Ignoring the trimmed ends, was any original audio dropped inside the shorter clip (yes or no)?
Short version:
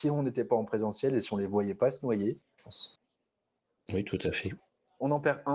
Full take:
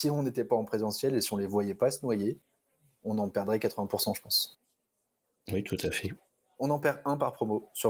yes